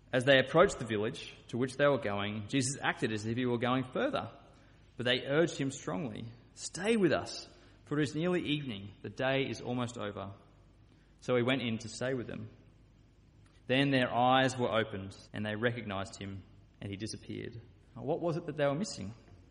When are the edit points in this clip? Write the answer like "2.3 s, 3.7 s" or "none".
13.6 s, 15.2 s, 17.9 s